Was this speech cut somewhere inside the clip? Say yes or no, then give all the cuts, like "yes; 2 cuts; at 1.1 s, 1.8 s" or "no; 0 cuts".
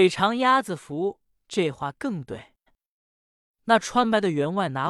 yes; 1 cut; at 2.7 s